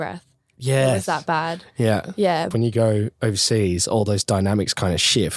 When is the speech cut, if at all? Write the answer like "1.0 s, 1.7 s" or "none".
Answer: 2.5 s